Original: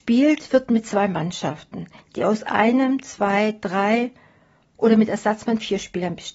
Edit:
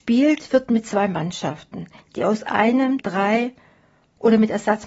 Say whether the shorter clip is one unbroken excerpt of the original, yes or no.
no